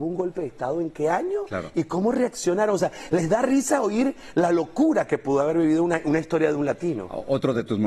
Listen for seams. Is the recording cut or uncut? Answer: uncut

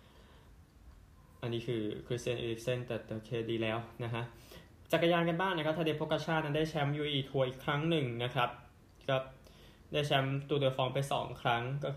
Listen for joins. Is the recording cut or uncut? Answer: cut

